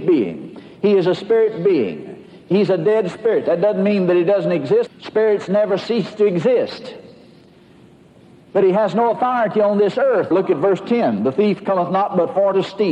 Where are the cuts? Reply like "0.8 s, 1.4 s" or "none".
4.9 s, 10.3 s